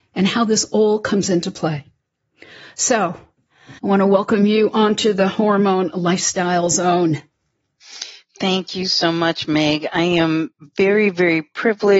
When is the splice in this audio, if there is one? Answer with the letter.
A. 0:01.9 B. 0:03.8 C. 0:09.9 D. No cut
B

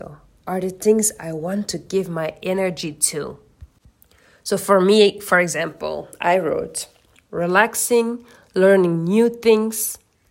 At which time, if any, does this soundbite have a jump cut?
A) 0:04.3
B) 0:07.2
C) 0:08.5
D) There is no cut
B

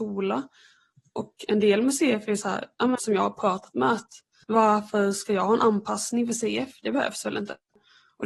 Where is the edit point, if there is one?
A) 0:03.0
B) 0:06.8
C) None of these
A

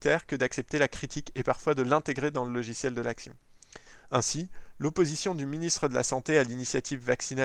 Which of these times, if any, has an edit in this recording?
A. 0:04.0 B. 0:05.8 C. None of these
C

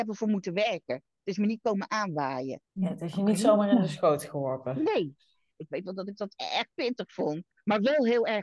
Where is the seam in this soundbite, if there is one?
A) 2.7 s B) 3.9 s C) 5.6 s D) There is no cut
C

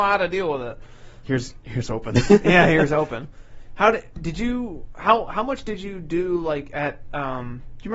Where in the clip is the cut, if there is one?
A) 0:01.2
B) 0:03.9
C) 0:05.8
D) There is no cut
A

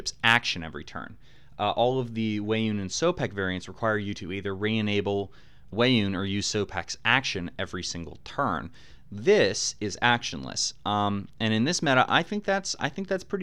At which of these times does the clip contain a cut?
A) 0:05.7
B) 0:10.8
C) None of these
A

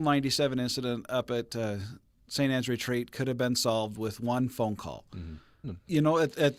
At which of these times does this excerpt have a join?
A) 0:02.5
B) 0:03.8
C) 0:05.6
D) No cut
C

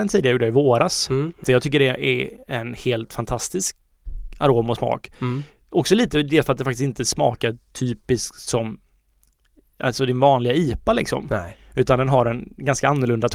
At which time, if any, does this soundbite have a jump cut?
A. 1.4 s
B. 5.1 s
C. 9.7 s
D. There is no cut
A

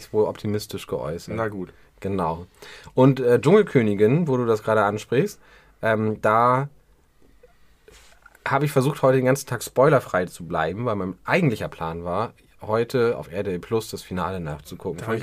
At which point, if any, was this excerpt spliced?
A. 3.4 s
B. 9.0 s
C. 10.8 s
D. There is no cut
D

